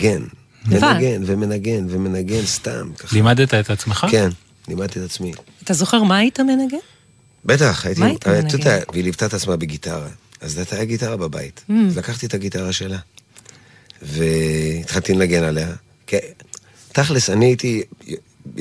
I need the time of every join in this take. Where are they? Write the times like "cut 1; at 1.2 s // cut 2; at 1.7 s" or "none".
cut 1; at 8.8 s